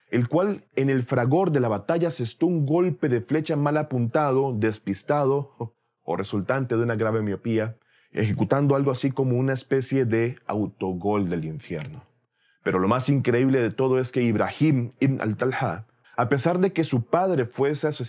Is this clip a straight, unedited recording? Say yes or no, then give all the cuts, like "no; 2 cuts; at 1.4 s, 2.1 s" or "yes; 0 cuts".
no; 1 cut; at 16.0 s